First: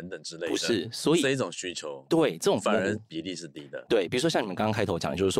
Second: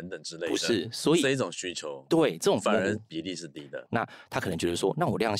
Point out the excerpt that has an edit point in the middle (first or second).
second